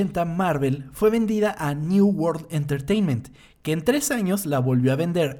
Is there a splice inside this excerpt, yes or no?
no